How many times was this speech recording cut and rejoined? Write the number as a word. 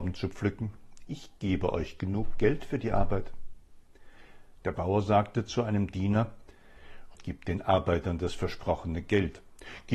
two